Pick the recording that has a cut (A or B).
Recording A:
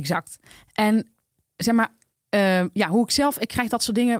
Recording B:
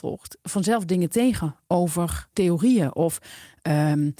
B